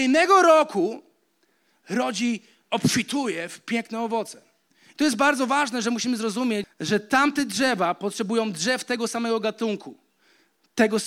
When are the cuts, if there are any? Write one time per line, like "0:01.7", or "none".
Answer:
0:06.6